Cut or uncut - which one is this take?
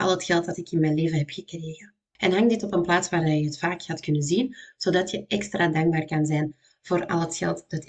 uncut